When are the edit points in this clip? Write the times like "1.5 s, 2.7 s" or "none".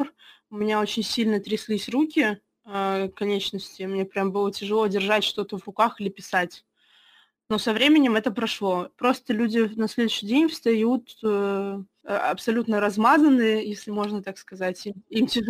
8.9 s

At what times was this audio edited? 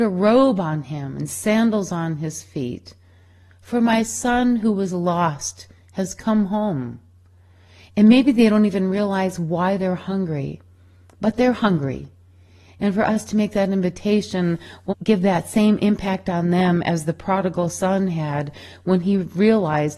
7.9 s, 14.9 s

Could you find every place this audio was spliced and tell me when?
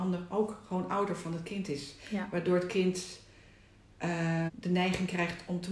4.5 s

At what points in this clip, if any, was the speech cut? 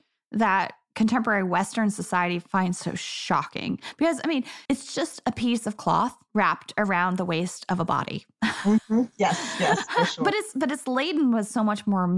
4.7 s

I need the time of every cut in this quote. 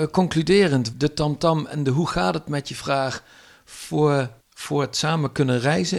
0.9 s, 4.4 s

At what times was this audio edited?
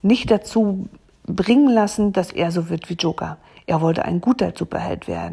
none

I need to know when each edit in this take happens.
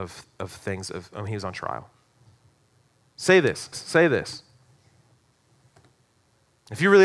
3.7 s

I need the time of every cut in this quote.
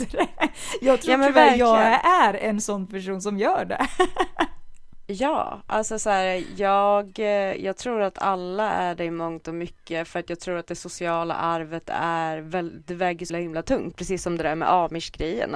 13.3 s

